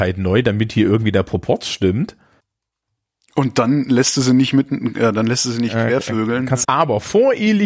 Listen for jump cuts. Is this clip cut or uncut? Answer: cut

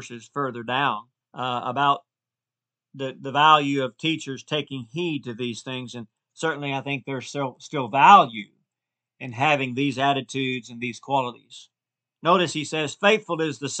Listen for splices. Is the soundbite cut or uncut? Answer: uncut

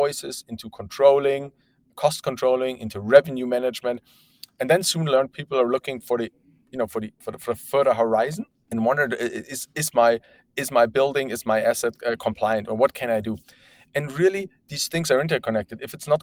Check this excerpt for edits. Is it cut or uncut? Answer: uncut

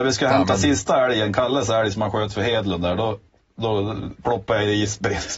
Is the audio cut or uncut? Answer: uncut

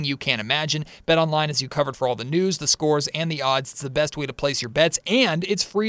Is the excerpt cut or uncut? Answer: uncut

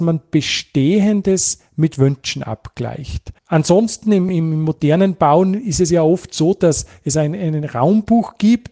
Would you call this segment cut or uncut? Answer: uncut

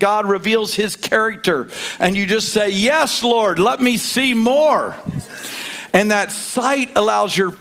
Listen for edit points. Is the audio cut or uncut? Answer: uncut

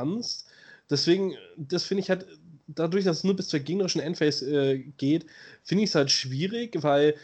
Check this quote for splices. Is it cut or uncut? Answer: uncut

